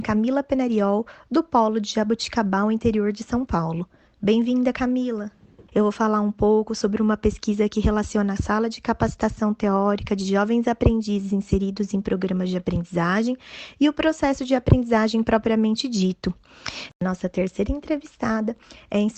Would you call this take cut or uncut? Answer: cut